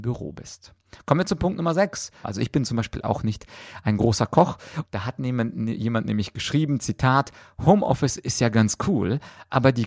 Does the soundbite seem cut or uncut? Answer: cut